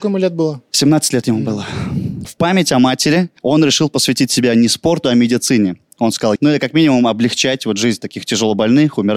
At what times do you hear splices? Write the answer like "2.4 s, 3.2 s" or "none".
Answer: 3.4 s, 6.4 s